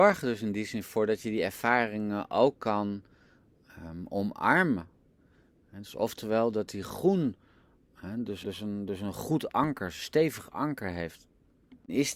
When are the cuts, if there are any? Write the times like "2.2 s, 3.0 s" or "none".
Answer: 8.4 s